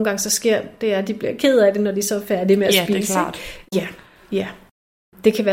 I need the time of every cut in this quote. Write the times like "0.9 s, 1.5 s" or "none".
3.7 s